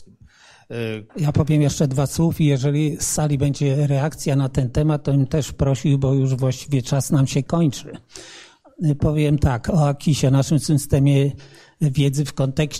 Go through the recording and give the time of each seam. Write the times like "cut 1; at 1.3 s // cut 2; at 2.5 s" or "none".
cut 1; at 1.1 s